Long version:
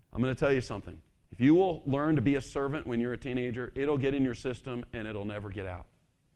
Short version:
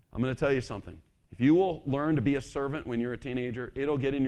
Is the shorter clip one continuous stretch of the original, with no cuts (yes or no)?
yes